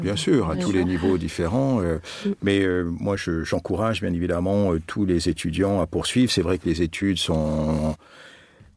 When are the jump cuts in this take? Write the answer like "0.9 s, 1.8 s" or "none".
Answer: none

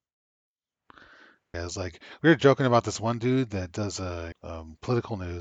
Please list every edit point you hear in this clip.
1.5 s, 4.3 s

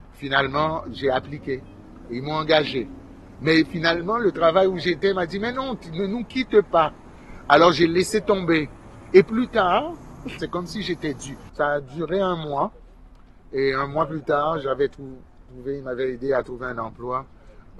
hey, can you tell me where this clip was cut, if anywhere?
10.4 s, 11.5 s

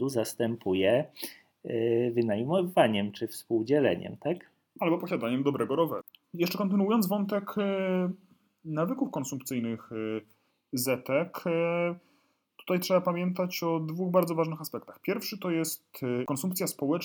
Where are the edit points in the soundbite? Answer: none

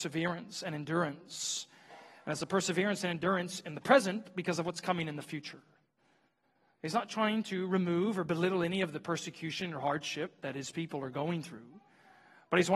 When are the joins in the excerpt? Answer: none

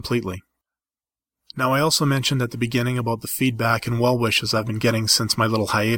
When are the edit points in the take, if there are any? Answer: none

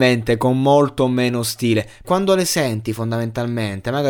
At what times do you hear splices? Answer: 2.0 s

